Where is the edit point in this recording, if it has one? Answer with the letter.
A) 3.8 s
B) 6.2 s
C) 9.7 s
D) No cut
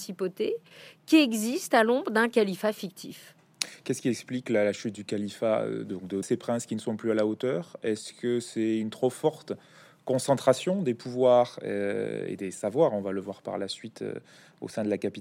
B